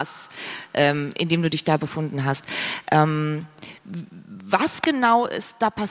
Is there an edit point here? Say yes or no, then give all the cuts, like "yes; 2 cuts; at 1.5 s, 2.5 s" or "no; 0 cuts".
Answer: no; 0 cuts